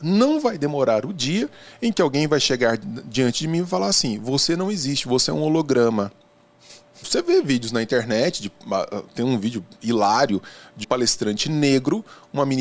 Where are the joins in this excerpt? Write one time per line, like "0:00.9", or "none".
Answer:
0:07.0
0:10.8